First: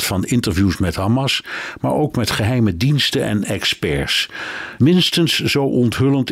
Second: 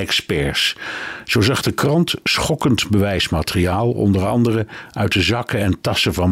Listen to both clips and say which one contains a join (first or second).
first